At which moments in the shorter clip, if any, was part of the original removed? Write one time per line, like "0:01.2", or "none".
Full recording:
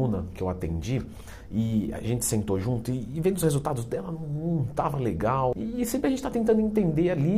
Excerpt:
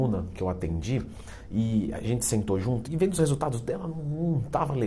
0:02.8